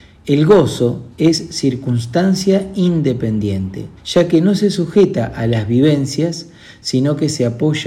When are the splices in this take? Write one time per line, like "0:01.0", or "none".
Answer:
0:01.1
0:04.0

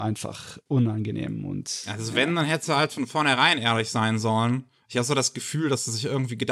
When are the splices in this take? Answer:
none

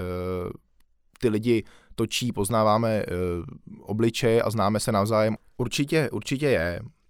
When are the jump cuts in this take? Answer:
0:05.4

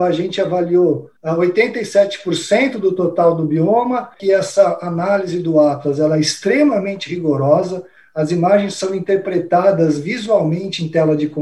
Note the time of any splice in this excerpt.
0:04.1

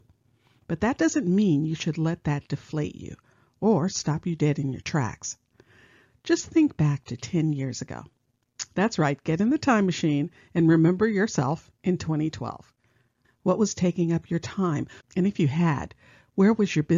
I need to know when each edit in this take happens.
0:13.2
0:15.0

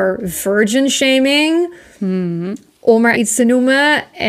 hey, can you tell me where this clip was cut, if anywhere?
0:03.1

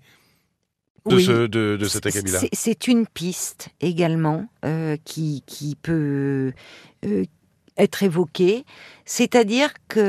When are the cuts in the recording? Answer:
0:01.1

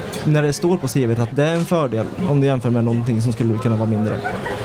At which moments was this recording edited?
0:01.3

